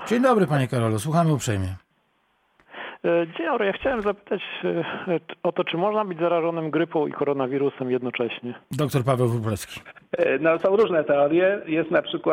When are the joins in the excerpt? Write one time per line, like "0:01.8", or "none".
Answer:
0:08.6